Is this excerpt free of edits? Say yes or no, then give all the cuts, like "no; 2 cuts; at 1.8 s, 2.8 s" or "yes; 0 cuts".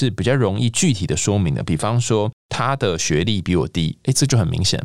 yes; 0 cuts